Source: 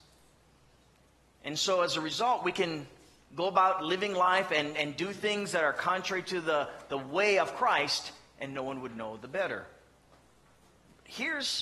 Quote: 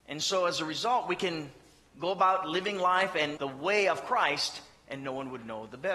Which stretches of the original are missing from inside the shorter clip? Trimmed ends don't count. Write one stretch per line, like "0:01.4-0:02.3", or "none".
0:04.7-0:06.9